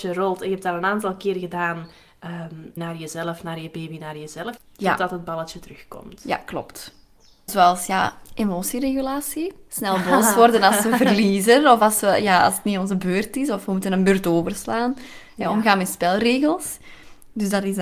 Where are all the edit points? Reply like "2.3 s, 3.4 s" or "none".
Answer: 2.8 s, 4.6 s, 7.5 s